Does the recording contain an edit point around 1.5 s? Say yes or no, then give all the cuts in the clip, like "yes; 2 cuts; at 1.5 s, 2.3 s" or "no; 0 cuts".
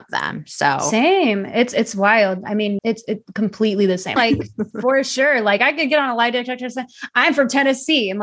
no; 2 cuts; at 2.8 s, 4.2 s